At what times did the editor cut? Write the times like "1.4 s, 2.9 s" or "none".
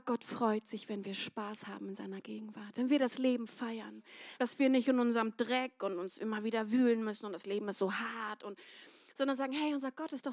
4.4 s